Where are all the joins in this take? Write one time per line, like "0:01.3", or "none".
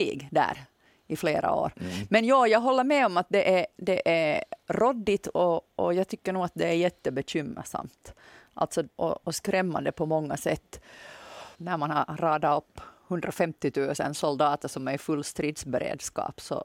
0:05.7
0:09.0
0:11.5

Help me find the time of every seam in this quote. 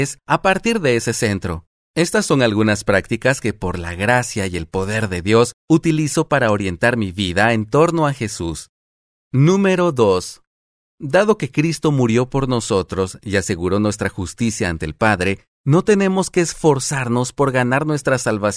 0:09.2
0:10.9

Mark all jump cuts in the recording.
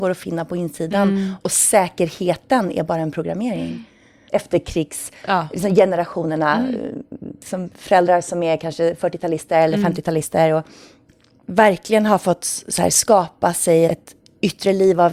0:04.3
0:13.9

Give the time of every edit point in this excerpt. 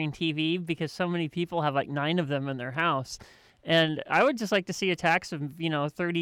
none

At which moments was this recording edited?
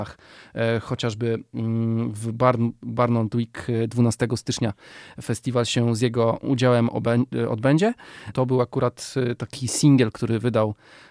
0:08.3

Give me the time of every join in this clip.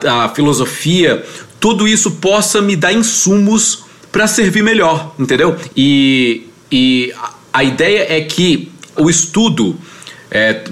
0:05.7
0:09.0

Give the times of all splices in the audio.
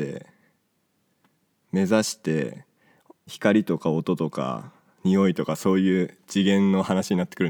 0:03.3

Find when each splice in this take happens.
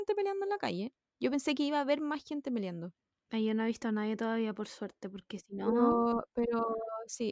none

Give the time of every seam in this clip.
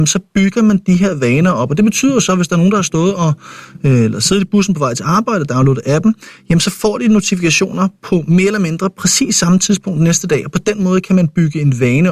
none

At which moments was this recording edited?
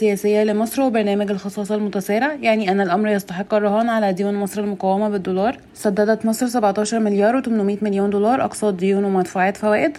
0:05.7

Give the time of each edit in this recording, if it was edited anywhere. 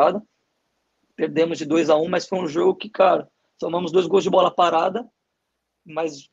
none

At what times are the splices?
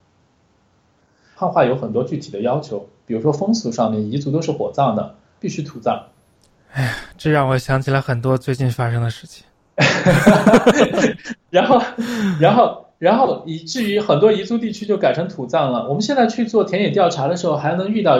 0:01.4
0:05.4

